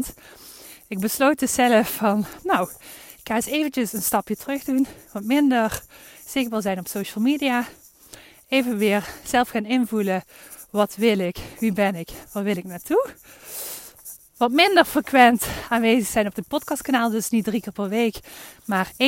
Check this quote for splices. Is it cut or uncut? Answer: uncut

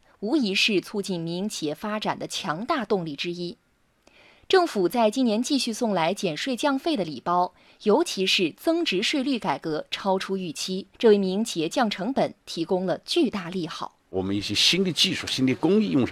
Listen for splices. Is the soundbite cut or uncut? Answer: cut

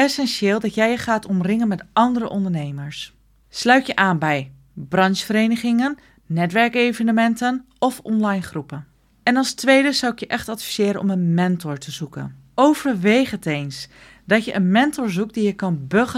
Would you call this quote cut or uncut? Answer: uncut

